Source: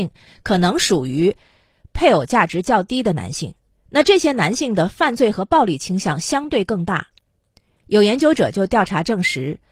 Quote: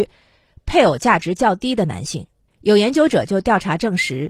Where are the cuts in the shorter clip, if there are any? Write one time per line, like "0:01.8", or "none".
0:02.5

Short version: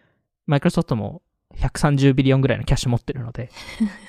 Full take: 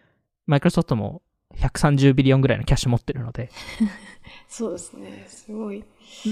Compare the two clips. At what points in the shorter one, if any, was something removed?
none

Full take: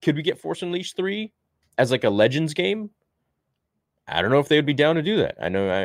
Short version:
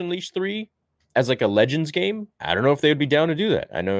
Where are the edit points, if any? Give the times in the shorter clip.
0:02.3

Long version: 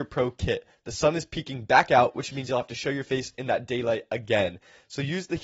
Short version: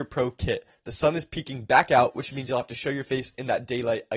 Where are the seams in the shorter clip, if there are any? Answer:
none

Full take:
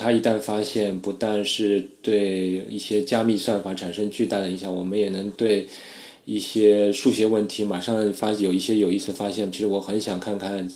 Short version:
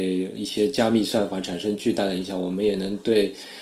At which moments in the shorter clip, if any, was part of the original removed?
none

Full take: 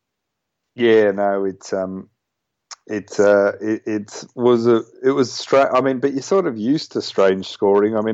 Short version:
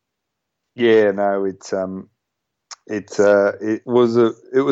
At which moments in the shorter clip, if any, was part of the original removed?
0:03.8

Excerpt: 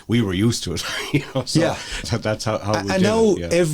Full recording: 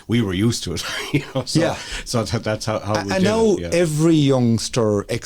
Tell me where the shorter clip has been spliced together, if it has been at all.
0:02.0

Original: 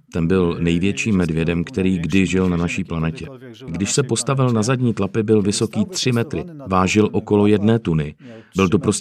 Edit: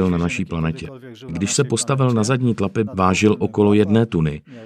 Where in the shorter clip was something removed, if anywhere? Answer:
0:02.9

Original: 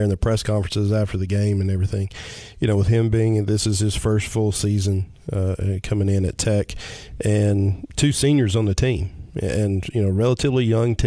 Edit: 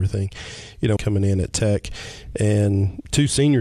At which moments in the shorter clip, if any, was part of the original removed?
0:01.0

